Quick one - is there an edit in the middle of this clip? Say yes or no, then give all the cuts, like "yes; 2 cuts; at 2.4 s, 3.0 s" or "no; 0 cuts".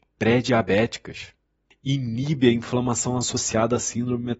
no; 0 cuts